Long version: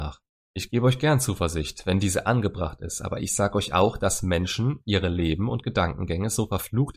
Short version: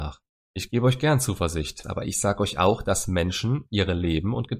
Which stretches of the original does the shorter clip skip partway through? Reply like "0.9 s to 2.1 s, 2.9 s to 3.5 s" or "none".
1.8 s to 3.0 s